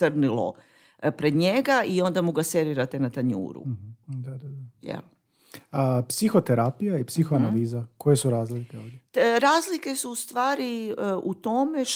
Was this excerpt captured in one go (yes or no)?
no